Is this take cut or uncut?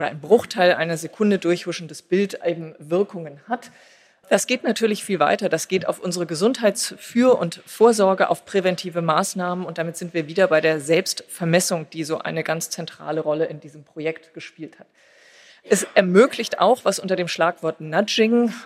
uncut